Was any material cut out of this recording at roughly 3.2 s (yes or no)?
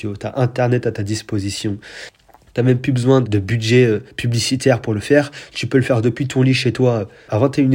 yes